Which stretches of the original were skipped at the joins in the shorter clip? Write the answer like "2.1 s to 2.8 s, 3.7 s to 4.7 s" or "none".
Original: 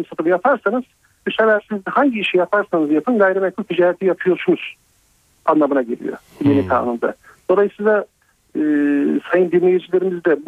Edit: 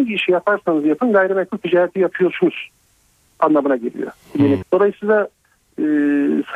6.7 s to 7.4 s

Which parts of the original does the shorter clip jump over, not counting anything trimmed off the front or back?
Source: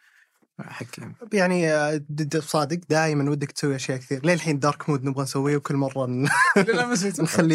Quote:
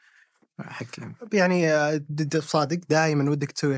none

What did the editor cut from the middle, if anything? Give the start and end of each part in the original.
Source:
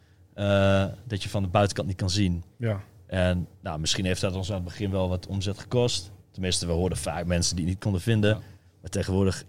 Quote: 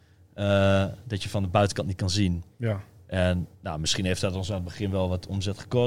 none

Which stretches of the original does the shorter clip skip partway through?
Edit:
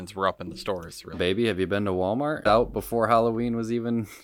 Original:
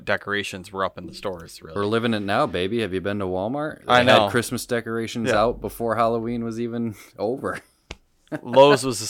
1.7 s to 2.5 s, 3.8 s to 5.3 s

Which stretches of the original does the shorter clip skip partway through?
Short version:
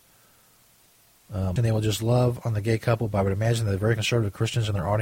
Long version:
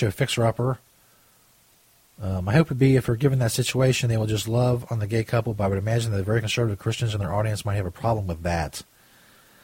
2.4 s to 4.0 s

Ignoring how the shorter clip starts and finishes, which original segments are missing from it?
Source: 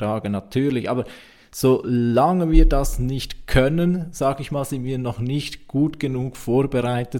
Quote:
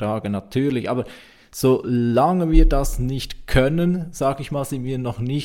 none

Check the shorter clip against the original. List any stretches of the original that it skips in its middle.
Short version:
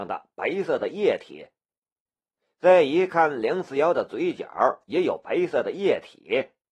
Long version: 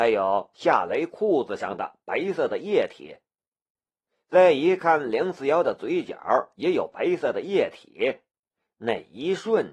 none

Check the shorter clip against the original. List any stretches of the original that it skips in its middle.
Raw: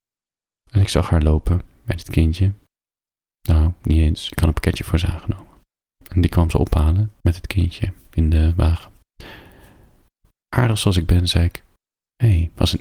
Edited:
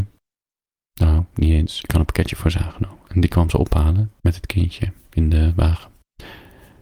5.5 s to 6.1 s

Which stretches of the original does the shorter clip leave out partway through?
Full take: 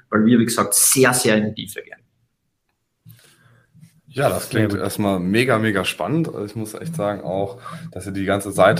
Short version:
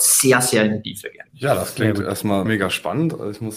2.0 s to 4.0 s, 5.2 s to 5.6 s

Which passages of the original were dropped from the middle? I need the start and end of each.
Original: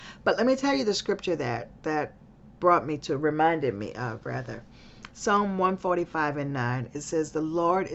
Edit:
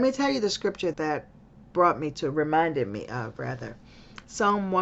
1.4 s to 1.8 s

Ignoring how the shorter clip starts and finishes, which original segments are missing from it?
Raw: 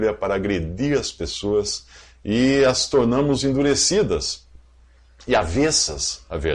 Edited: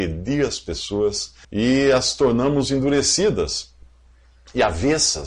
2.0 s to 2.2 s

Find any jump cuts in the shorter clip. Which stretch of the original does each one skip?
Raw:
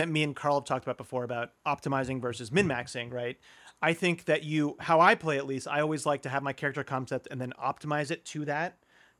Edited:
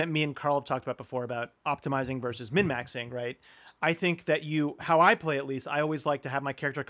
none

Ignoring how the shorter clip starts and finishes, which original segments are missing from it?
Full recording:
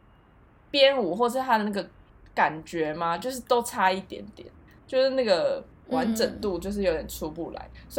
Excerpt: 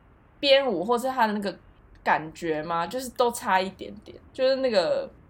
4.6 s to 4.8 s

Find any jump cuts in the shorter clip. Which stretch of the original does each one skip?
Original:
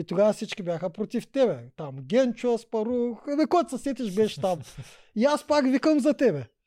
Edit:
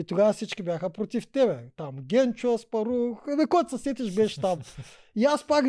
none

